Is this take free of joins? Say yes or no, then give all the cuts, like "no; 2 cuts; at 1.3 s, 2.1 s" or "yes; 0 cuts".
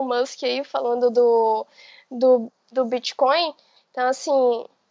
no; 1 cut; at 3.8 s